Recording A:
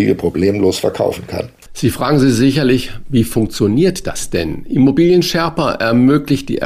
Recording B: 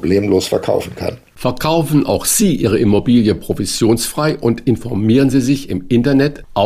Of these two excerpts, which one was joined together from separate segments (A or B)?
A